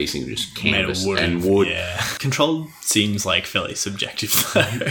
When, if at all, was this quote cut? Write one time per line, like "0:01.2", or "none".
0:02.2

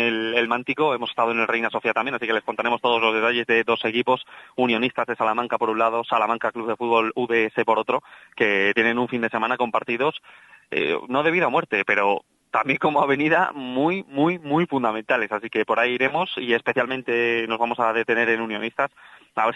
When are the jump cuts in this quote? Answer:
none

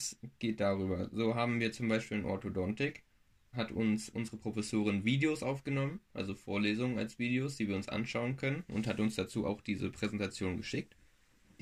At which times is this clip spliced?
0:03.5

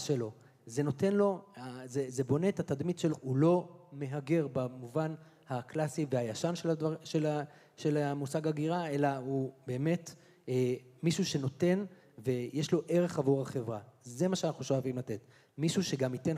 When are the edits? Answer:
0:02.1
0:03.1

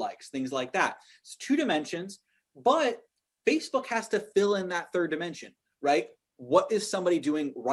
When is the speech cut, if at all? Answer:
none

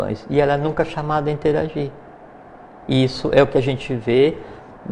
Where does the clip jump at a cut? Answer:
none

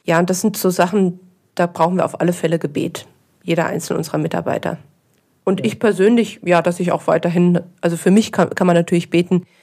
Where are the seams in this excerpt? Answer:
none

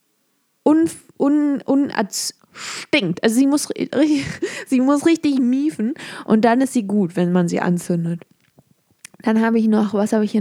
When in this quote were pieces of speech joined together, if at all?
0:02.4

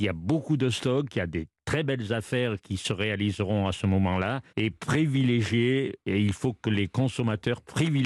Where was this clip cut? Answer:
0:04.5

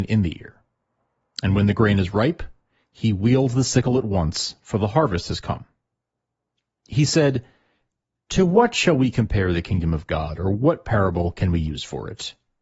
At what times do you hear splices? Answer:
none

